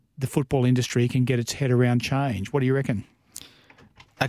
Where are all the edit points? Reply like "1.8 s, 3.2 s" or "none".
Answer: none